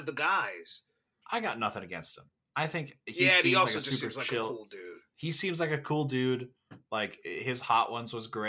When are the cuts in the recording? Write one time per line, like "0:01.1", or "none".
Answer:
0:01.2
0:05.1